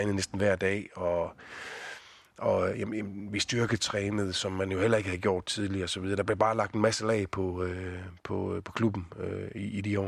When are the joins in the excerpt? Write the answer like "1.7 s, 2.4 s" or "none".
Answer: none